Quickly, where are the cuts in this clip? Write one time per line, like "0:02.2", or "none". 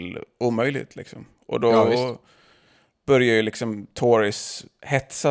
none